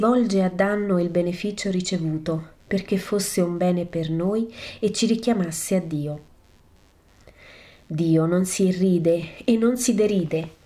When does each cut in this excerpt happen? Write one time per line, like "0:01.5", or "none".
none